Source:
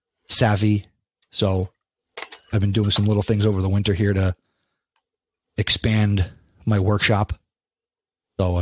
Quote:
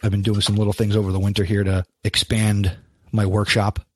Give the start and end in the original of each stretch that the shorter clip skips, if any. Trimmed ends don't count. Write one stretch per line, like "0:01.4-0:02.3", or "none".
0:04.4-0:05.5

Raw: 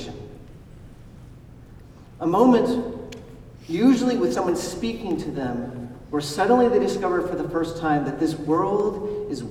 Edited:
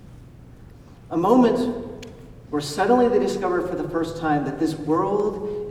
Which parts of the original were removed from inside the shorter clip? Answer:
0:03.6-0:06.1

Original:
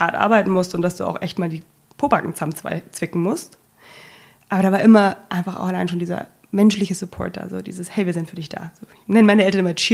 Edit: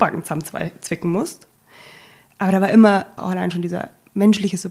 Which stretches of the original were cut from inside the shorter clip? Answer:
0:05.3-0:05.5

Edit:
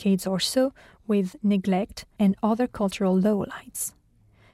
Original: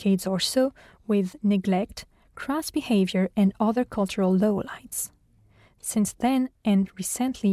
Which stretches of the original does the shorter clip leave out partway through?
0:02.2-0:03.3

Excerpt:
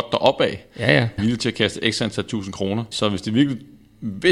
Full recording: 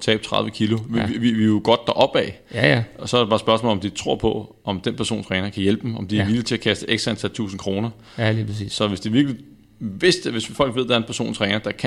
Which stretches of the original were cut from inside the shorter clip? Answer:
0:02.9-0:06.2
0:08.0-0:08.7

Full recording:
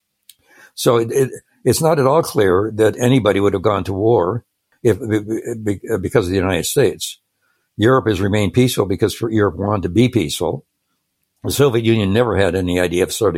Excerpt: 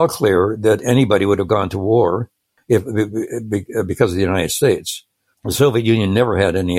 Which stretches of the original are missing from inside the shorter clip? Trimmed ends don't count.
0:07.5-0:11.3

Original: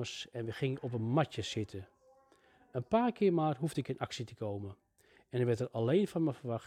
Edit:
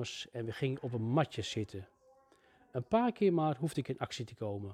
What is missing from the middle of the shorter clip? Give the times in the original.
none

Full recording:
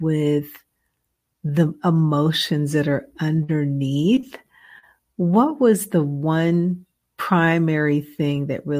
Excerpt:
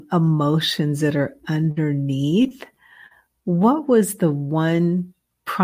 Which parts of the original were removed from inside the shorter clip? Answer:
none

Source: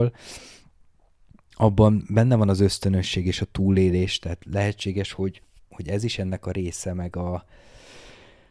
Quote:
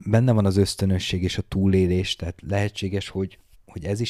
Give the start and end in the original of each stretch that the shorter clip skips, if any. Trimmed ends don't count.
none

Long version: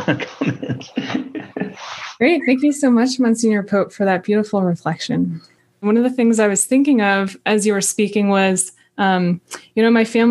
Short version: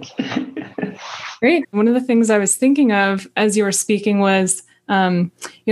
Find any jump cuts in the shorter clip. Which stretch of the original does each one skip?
0:02.4-0:05.7

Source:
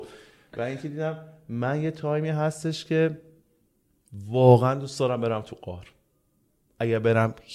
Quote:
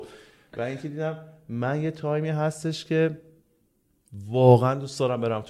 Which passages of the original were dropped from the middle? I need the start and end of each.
none

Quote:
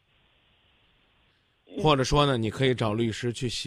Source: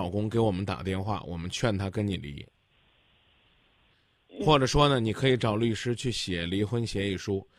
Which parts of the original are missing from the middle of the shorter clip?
none

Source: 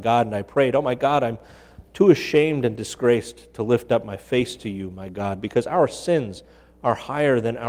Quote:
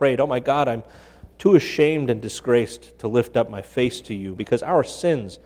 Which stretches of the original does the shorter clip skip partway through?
0:04.9-0:05.4

